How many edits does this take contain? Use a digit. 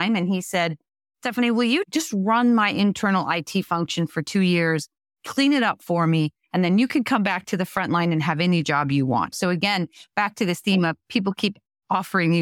1